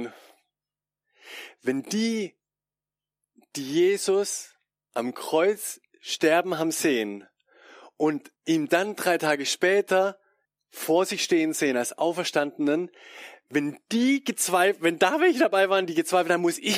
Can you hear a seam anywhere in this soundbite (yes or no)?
yes